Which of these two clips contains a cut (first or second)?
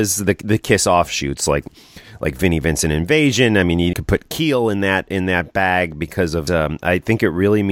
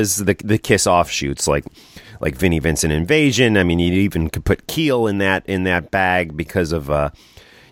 first